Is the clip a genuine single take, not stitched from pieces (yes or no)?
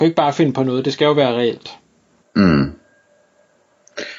yes